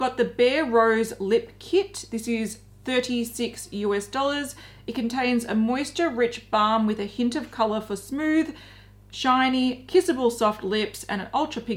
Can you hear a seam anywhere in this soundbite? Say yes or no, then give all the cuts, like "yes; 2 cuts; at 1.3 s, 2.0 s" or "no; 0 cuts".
no; 0 cuts